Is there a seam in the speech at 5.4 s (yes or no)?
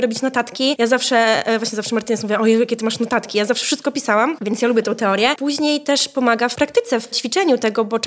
no